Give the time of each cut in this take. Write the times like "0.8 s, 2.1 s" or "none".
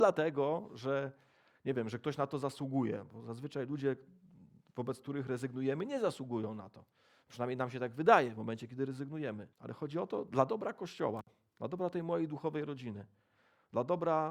9.5 s